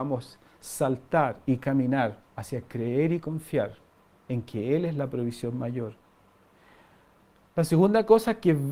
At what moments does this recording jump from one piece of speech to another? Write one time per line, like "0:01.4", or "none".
0:02.3